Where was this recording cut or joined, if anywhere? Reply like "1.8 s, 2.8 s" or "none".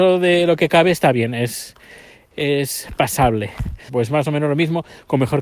3.9 s